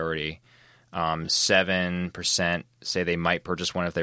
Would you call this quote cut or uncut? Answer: uncut